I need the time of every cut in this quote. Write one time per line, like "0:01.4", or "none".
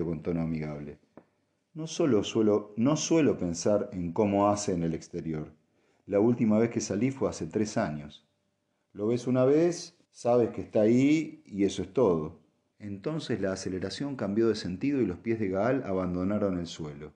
0:10.0
0:12.7